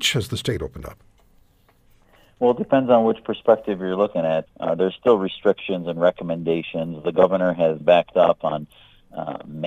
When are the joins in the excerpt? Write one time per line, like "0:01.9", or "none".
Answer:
0:04.5
0:07.8